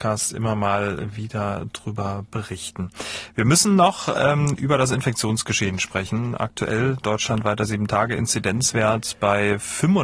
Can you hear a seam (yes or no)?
no